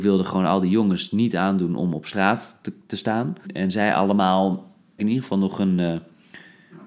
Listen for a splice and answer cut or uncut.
cut